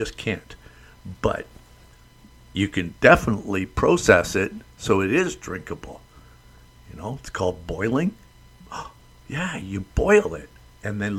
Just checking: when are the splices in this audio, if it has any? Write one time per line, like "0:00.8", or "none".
none

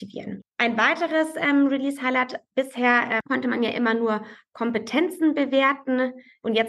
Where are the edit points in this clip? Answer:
none

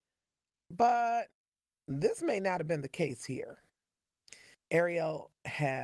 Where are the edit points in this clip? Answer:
0:04.5

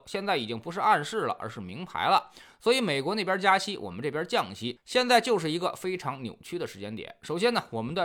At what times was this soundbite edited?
none

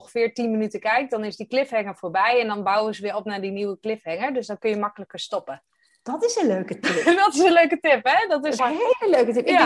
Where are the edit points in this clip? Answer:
0:08.6

